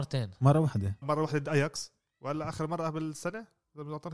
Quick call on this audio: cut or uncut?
cut